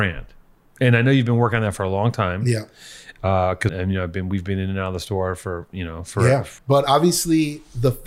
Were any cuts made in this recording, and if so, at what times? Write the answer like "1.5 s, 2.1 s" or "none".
3.7 s, 6.6 s